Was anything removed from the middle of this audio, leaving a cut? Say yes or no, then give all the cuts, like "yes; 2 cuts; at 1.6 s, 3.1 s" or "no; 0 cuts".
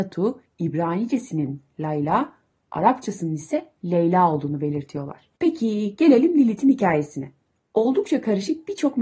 yes; 1 cut; at 5.4 s